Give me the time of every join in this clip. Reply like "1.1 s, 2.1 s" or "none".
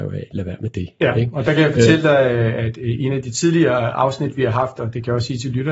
none